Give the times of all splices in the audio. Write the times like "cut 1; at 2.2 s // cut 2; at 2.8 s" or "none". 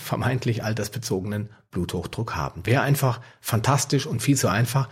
cut 1; at 2.6 s